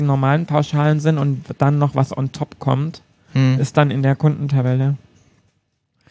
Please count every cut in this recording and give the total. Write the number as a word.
zero